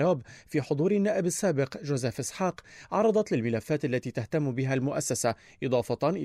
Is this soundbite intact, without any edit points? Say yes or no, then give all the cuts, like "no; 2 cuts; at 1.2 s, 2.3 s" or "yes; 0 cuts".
yes; 0 cuts